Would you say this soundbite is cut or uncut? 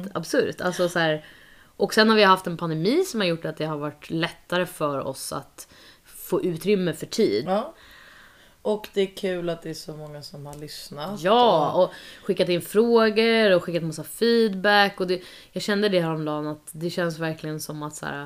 cut